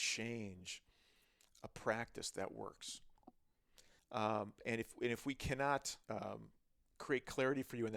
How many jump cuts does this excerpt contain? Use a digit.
2